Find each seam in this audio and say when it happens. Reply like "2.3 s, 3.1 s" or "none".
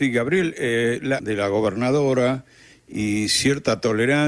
1.2 s